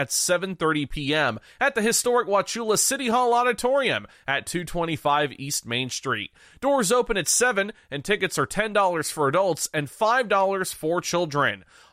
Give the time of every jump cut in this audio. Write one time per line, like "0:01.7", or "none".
none